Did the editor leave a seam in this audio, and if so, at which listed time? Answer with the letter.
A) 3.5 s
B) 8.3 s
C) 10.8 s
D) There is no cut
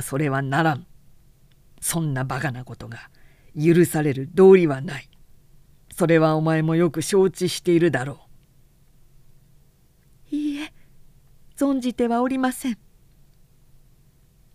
D